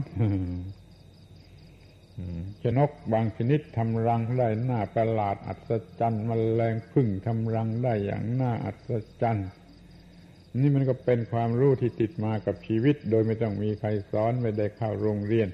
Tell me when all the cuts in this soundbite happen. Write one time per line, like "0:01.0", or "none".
0:02.7

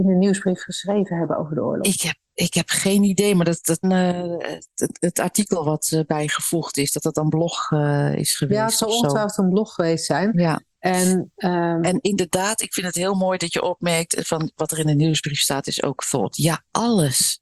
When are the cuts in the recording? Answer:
0:03.8

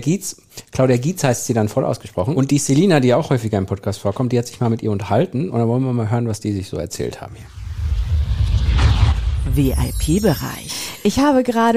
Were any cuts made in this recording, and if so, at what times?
none

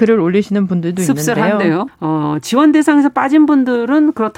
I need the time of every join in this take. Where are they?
0:01.9

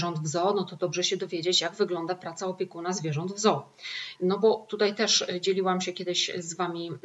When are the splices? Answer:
0:04.2

